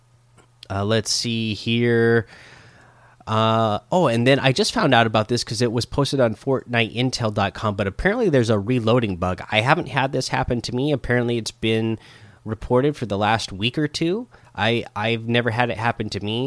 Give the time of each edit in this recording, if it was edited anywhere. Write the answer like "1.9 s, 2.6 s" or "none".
none